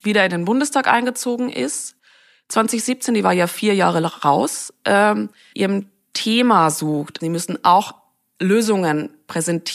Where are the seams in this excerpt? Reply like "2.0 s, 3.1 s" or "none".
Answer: 5.5 s, 7.2 s